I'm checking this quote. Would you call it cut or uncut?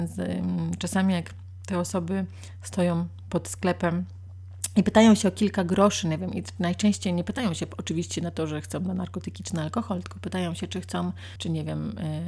cut